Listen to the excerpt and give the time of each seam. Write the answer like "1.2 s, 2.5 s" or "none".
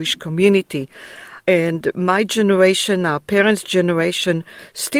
1.4 s